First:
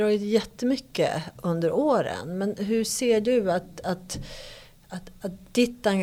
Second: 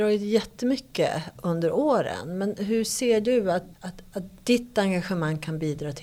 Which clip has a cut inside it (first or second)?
second